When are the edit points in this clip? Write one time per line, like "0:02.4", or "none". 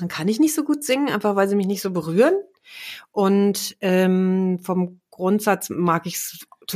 none